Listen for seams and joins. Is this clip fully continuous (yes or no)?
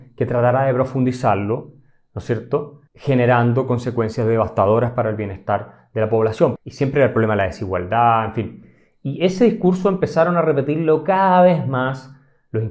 no